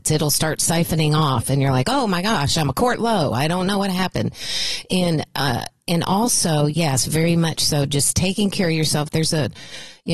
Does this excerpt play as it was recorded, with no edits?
yes; 0 cuts

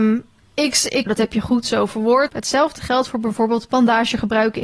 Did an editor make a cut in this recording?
yes; 2 cuts; at 1.1 s, 2.3 s

